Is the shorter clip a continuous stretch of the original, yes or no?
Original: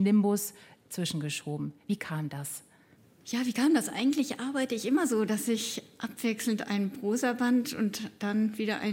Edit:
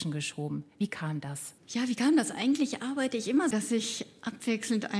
no